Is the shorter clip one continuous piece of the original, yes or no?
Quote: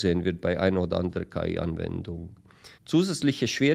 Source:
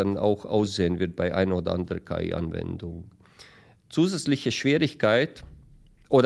no